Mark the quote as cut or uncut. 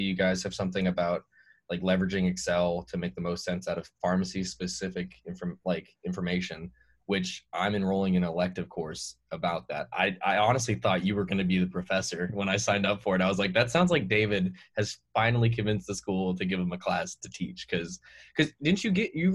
uncut